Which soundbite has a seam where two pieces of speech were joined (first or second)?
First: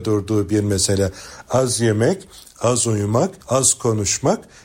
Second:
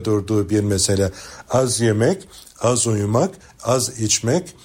first